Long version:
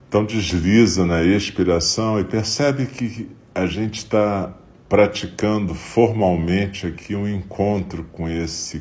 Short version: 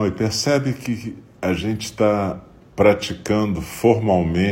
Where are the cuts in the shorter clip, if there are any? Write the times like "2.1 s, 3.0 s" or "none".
none